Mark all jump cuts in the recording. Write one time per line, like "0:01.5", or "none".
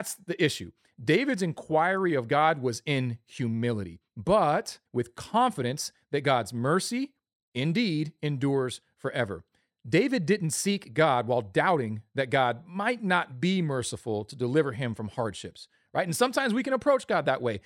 0:04.9

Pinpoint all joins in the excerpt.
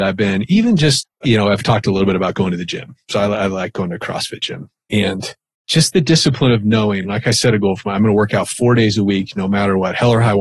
none

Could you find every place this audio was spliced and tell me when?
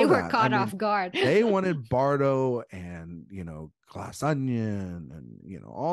none

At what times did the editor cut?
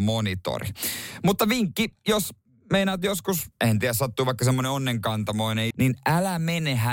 0:03.5
0:05.7

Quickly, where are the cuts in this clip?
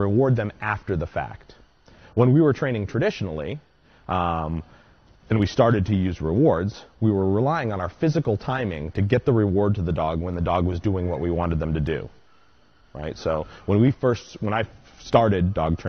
none

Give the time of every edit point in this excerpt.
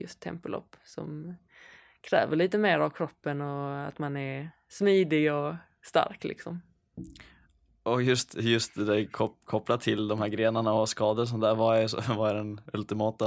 none

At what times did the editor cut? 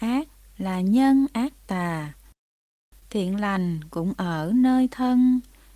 0:03.0

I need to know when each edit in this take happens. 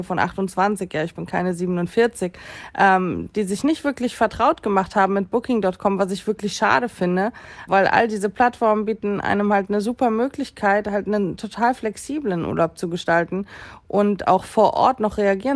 0:07.7

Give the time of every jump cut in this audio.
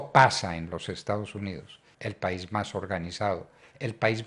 0:01.9

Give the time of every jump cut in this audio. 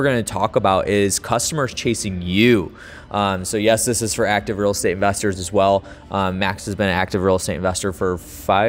none

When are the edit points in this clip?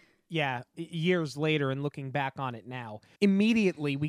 0:03.1

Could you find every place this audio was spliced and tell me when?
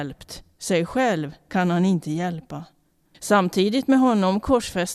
0:03.1

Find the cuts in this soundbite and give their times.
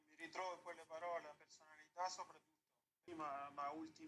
0:03.1

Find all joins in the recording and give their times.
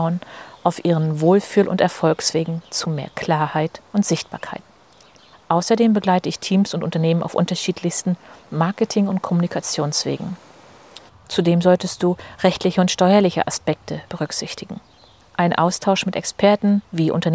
0:11.1
0:14.1

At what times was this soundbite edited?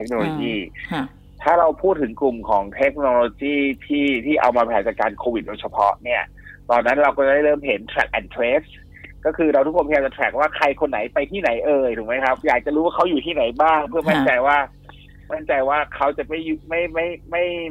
0:12.4

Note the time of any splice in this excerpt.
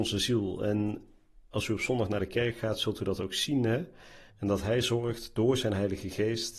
0:04.3

